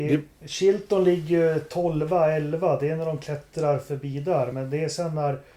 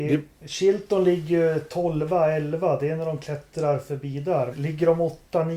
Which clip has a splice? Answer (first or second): second